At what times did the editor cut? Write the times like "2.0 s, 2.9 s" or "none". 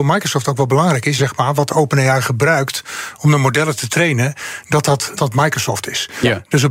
1.2 s, 5.2 s